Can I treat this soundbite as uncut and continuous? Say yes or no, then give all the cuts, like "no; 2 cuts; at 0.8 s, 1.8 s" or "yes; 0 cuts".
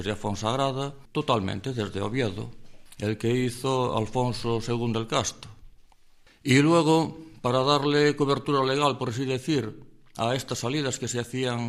no; 1 cut; at 1.0 s